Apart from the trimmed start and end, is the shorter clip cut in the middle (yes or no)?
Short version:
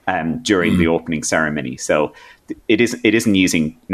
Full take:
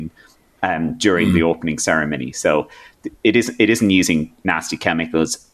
no